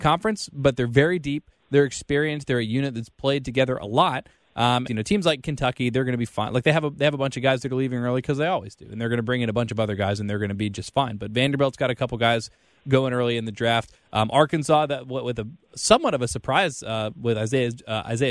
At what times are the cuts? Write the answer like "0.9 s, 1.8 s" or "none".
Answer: 4.9 s